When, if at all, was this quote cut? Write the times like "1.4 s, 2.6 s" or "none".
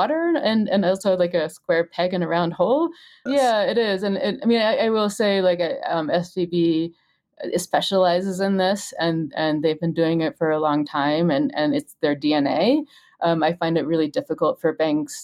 3.3 s